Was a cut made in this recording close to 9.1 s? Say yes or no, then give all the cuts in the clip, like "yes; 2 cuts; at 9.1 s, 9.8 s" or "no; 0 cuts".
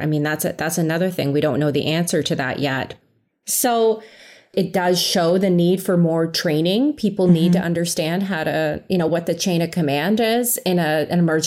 no; 0 cuts